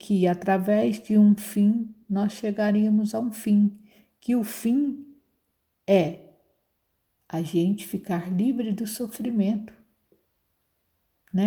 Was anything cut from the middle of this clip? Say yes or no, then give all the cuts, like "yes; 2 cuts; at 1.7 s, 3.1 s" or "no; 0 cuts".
yes; 1 cut; at 2.0 s